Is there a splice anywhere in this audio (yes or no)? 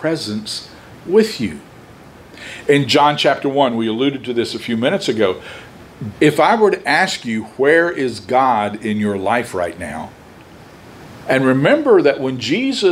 yes